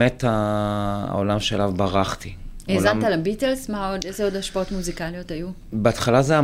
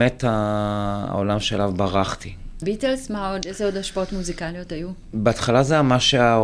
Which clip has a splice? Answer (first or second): second